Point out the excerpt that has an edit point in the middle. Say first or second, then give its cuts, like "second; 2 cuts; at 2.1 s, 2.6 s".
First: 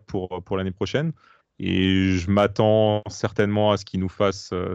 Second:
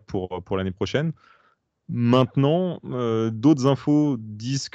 first; 1 cut; at 1.4 s